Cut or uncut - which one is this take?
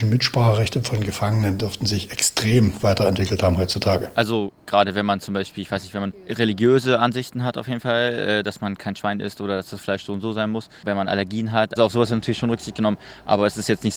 cut